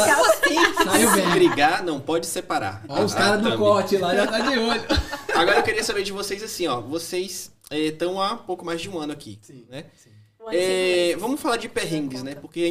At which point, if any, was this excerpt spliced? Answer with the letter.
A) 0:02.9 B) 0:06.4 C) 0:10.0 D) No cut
D